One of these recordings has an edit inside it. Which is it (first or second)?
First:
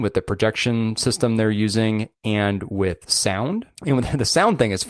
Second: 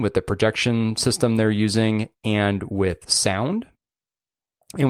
first